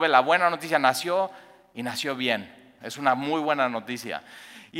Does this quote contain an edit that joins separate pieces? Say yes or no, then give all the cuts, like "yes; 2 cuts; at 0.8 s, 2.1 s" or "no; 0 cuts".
yes; 1 cut; at 2.8 s